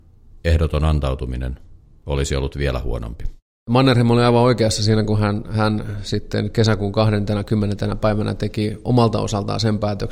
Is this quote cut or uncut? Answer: uncut